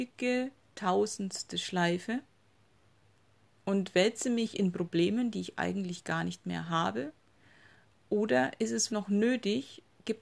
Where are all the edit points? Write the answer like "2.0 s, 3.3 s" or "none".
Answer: 8.9 s